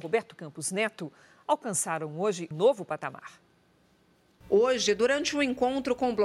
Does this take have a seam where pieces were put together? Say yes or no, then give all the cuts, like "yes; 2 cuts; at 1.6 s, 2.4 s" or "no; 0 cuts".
yes; 1 cut; at 2.5 s